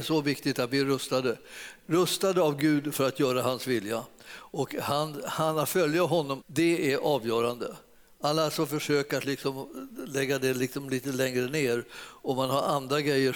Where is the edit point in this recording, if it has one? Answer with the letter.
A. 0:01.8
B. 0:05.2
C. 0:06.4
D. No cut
C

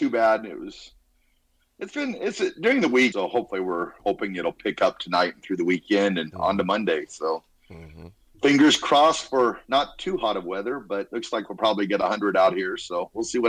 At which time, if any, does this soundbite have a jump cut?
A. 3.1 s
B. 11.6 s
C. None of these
A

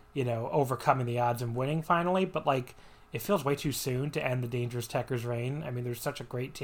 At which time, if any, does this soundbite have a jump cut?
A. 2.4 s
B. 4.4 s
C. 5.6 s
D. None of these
D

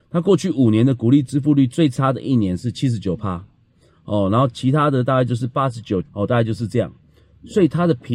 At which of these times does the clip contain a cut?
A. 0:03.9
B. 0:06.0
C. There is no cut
B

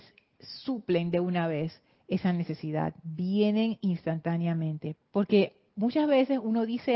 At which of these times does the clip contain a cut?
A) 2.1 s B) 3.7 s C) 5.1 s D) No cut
C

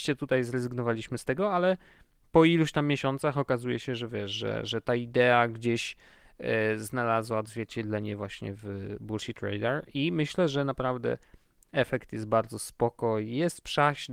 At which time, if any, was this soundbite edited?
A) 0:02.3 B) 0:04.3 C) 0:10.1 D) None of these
D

